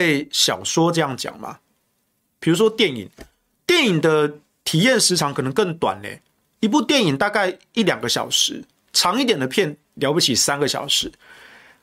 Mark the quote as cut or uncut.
uncut